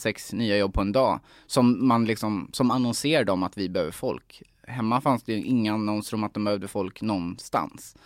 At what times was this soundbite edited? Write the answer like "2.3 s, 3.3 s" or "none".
none